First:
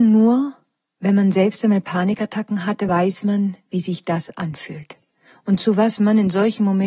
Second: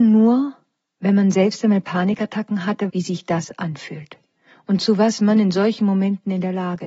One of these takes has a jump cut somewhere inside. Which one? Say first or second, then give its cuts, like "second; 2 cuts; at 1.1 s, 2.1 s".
second; 1 cut; at 2.9 s